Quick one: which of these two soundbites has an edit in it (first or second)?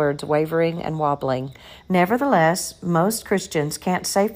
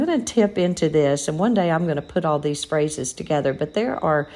first